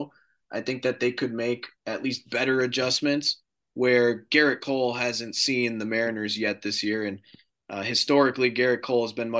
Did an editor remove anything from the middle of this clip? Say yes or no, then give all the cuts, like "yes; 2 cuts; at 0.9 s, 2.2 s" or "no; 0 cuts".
no; 0 cuts